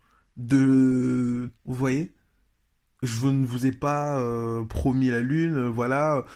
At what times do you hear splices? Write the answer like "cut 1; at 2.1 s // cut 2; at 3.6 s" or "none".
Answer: cut 1; at 1.6 s